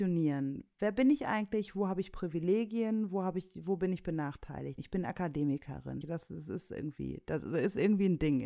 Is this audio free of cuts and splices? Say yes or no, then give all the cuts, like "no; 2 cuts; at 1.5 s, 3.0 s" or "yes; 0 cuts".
no; 2 cuts; at 4.8 s, 6.0 s